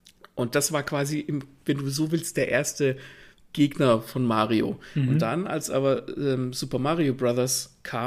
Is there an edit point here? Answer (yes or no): no